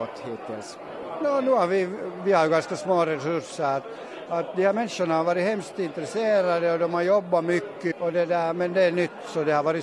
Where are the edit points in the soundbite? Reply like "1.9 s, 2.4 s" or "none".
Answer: 4.3 s, 7.9 s